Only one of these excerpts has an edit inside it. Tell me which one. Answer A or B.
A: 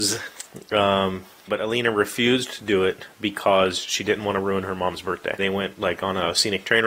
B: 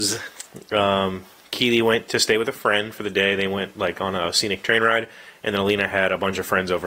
A